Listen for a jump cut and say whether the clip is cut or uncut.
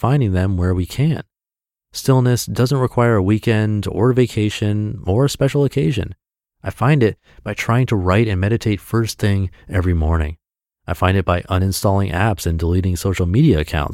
cut